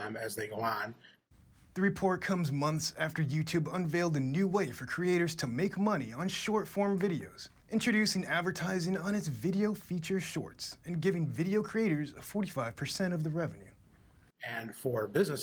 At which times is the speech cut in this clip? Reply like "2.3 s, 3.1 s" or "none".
7.6 s

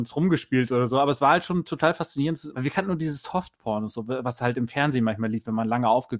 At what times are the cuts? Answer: 2.5 s

